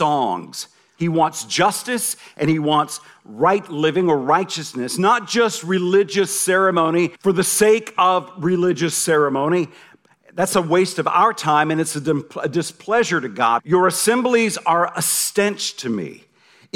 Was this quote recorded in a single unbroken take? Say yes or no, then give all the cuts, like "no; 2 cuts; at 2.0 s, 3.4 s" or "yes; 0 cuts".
no; 3 cuts; at 1.0 s, 7.2 s, 13.6 s